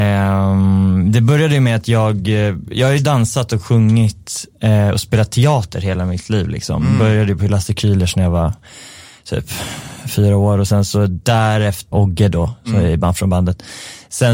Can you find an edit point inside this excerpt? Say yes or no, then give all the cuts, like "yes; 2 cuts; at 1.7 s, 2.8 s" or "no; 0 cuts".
yes; 1 cut; at 11.9 s